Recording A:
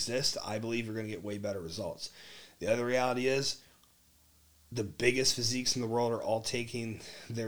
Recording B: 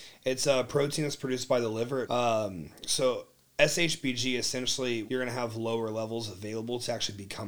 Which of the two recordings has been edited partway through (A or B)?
B